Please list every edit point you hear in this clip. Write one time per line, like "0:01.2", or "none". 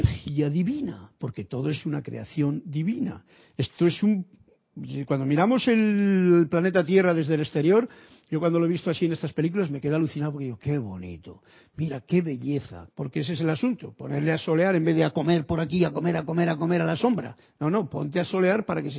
0:12.9